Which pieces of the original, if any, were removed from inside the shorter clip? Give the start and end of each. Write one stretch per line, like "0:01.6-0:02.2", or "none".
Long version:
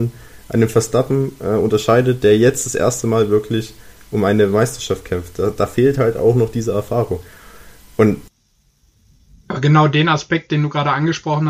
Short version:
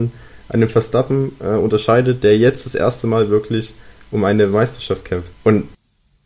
0:05.3-0:07.9